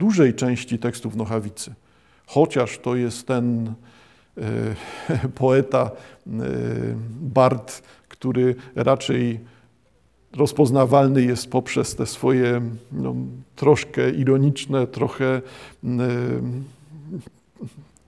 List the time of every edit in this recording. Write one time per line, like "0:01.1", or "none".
none